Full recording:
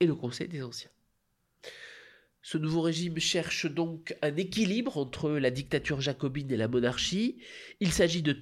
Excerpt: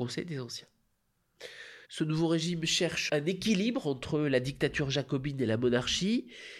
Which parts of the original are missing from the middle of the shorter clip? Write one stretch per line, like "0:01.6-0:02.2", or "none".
0:02.1-0:02.4
0:03.6-0:04.2

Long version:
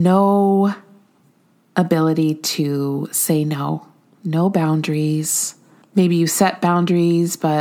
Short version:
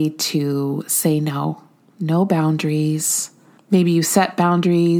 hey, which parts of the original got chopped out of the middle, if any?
none

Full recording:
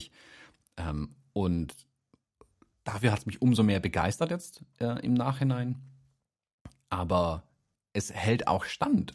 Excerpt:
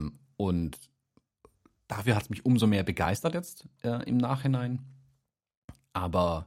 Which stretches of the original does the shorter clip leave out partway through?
none

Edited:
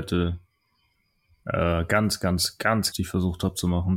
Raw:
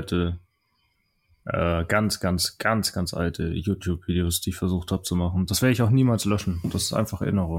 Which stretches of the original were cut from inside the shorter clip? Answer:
0:02.9-0:04.4

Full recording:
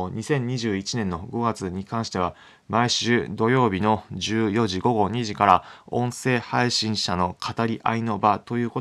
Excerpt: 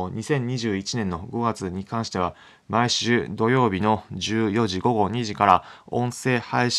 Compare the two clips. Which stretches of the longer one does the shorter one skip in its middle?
none

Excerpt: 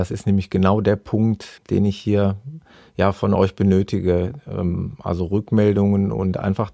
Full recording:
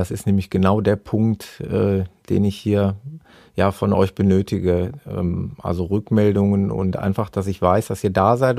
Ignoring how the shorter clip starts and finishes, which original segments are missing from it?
0:01.6-0:02.2

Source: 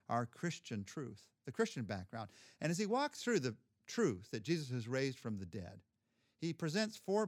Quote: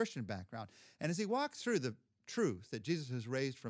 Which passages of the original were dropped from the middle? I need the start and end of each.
none

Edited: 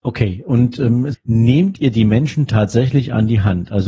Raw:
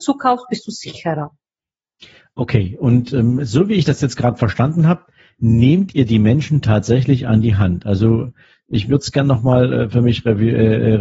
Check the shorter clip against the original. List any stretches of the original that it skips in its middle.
0:03.5-0:05.3

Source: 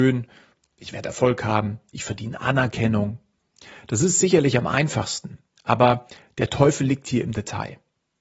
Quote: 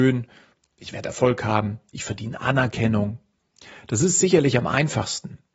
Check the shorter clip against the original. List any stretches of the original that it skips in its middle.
none

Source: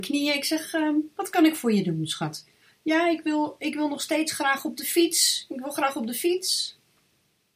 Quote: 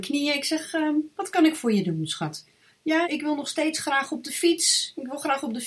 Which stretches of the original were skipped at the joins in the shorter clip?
0:03.0-0:03.6

